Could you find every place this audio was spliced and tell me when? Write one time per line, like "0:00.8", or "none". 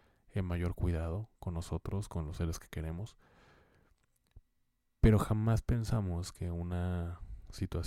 none